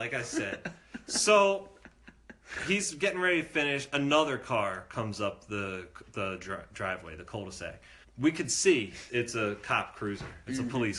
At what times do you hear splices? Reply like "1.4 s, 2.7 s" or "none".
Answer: 8.0 s, 9.1 s